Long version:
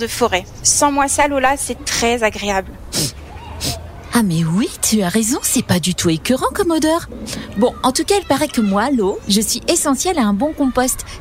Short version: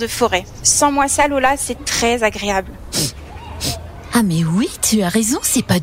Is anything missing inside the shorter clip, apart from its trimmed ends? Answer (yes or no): no